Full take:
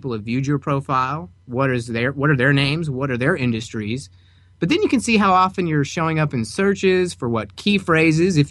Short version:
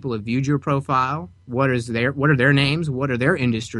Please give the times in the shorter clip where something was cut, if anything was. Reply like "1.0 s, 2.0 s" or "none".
none